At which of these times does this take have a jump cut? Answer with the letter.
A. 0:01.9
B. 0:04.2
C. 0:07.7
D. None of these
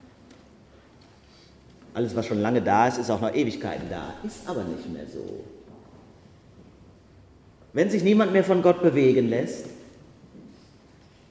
A